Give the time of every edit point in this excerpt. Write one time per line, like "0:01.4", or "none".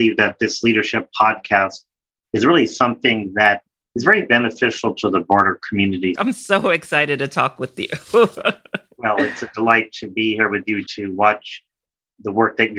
0:06.2
0:10.9